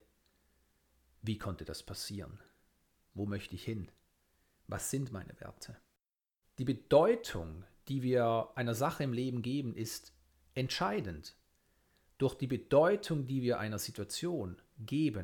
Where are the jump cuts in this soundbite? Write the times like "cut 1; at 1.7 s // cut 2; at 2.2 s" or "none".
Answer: cut 1; at 3.1 s // cut 2; at 6.4 s